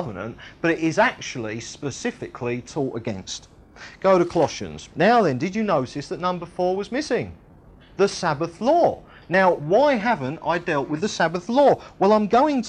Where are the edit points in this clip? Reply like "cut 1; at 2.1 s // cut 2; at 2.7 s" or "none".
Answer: cut 1; at 4.9 s